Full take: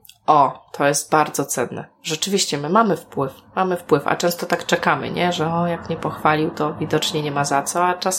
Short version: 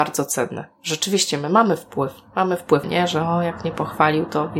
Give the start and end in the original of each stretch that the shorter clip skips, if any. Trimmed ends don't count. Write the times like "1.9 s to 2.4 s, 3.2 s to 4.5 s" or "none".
4.0 s to 5.1 s